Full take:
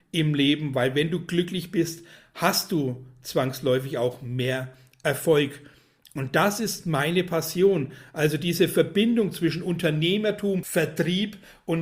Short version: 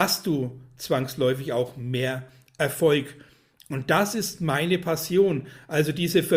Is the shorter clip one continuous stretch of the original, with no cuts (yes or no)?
yes